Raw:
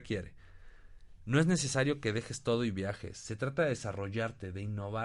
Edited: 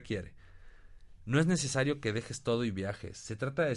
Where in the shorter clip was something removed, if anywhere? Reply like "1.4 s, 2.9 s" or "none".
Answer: none